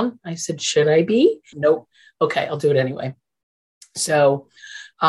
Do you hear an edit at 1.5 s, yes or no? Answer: yes